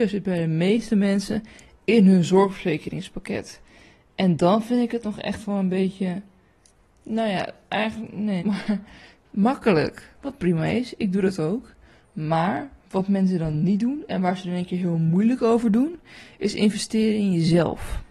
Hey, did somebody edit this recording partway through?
yes; 2 cuts; at 8.4 s, 10.2 s

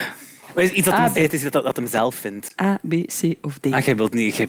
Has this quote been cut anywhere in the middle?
yes; 2 cuts; at 1.1 s, 2.6 s

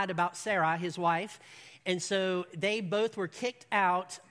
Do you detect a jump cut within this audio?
no; 0 cuts

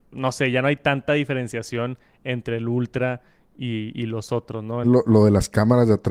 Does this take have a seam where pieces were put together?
yes; 1 cut; at 4.8 s

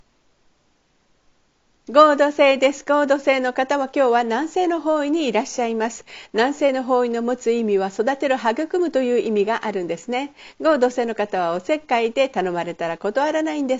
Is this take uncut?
yes; 0 cuts

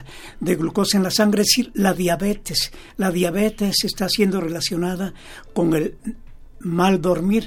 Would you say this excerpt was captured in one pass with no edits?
yes; 0 cuts

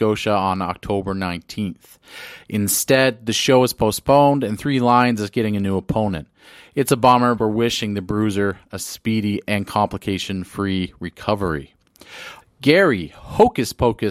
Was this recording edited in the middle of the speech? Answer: yes; 2 cuts; at 7.4 s, 12.4 s

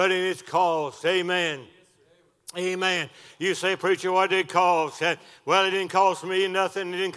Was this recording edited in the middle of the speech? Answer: no; 0 cuts

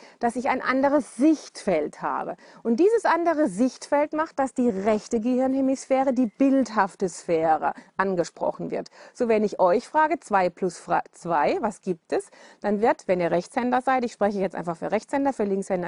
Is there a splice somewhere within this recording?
no; 0 cuts

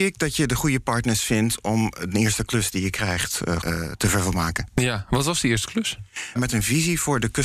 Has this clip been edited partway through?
yes; 2 cuts; at 3.6 s, 6.4 s

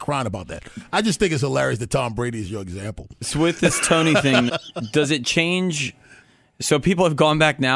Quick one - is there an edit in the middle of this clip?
yes; 1 cut; at 4.5 s

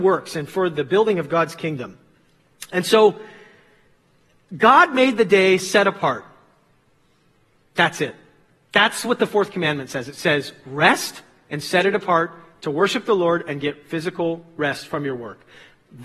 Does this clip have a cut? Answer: no; 0 cuts

